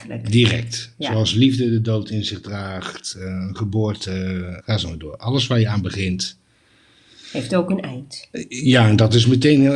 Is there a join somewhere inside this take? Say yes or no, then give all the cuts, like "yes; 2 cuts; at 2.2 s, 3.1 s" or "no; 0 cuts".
yes; 1 cut; at 4.6 s